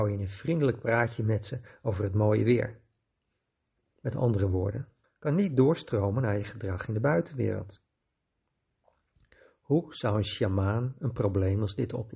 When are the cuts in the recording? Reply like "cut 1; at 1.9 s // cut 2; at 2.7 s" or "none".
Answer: cut 1; at 5.0 s